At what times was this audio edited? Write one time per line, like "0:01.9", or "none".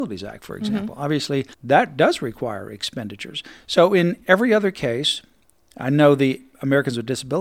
0:01.5